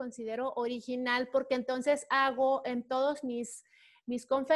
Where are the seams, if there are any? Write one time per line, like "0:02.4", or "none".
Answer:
none